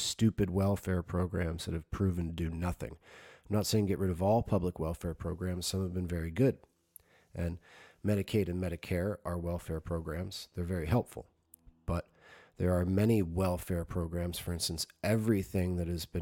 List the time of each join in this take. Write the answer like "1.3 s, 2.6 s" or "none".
none